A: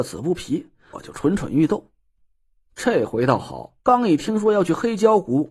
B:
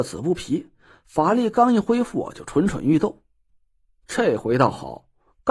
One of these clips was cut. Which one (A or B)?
A